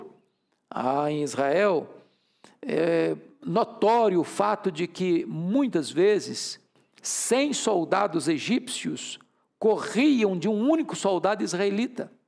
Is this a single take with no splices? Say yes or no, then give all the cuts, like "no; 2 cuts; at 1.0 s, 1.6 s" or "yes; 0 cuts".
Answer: yes; 0 cuts